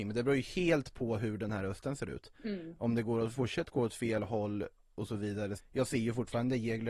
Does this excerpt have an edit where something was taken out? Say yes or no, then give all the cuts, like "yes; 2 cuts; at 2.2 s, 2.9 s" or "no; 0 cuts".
yes; 1 cut; at 5.6 s